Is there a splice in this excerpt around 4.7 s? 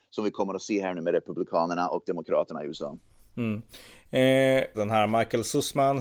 yes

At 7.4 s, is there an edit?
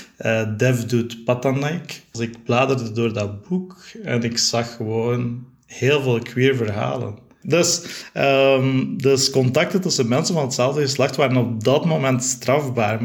yes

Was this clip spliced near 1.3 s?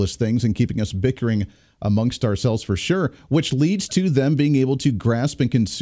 no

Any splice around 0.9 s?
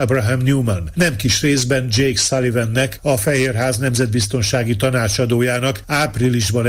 no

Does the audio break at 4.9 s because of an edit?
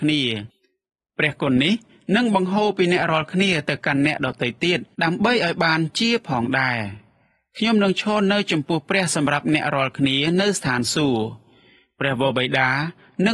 yes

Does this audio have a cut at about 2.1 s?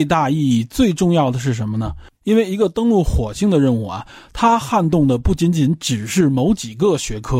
yes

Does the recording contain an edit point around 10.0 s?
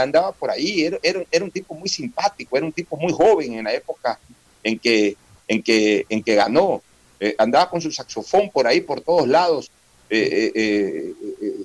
no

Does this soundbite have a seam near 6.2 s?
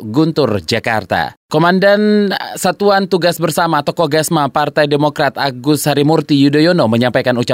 no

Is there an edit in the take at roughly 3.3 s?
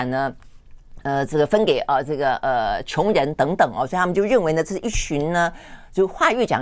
no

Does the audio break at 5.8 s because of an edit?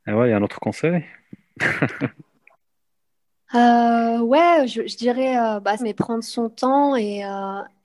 yes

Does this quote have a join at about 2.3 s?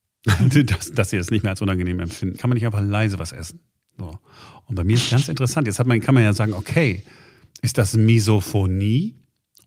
yes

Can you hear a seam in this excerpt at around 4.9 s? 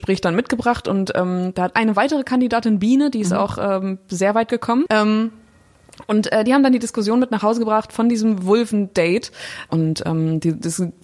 yes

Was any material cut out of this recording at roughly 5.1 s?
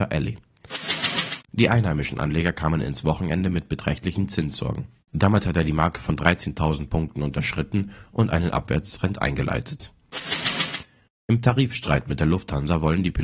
yes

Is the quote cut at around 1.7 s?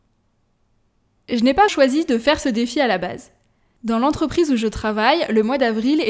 yes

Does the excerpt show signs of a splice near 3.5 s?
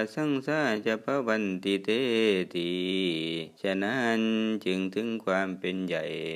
yes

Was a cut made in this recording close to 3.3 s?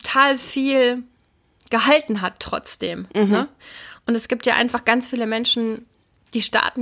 no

